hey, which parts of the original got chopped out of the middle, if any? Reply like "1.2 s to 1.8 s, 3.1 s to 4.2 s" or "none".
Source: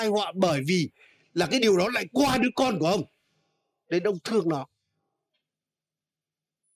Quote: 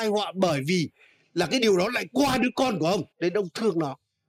3.1 s to 3.8 s

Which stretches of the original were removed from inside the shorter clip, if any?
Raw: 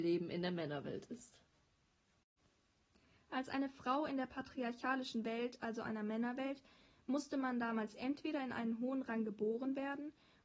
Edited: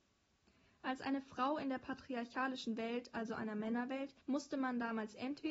6.7 s to 7.0 s

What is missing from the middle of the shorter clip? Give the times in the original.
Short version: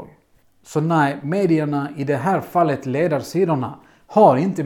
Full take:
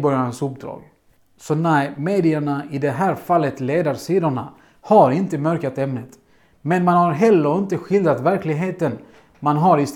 none

